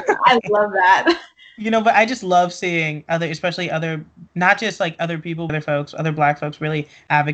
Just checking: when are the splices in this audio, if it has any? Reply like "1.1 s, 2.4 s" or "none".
4.3 s, 5.5 s

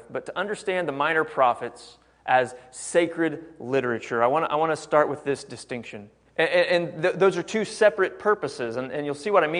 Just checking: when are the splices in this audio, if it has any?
6.3 s

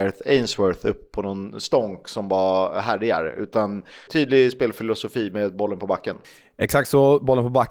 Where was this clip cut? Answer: 4.1 s

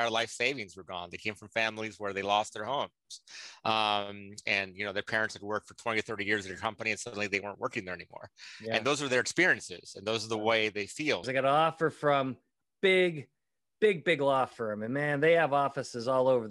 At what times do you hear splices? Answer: 11.2 s

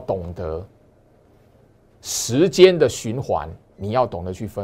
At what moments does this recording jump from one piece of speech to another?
3.7 s

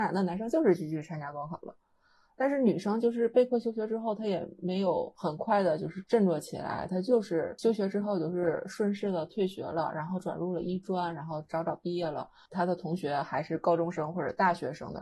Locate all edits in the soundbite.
none

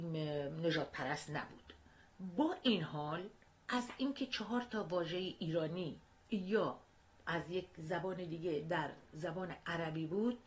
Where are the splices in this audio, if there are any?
none

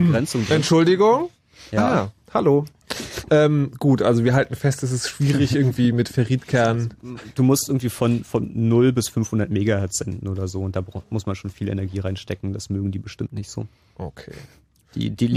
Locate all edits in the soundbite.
none

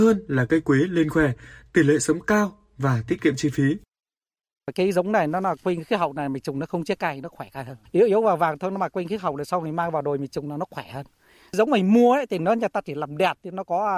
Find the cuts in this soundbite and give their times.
none

